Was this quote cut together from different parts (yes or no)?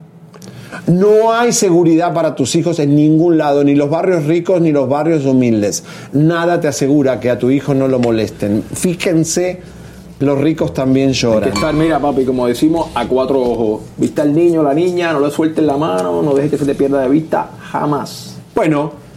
no